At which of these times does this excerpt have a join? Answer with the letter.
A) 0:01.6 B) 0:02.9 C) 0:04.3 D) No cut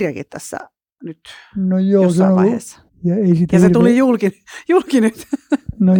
B